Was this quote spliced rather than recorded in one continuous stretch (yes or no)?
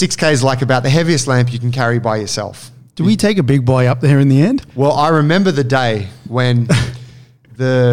no